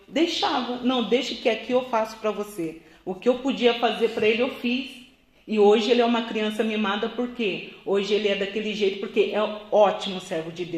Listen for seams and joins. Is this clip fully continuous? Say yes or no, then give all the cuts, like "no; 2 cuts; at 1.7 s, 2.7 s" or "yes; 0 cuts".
yes; 0 cuts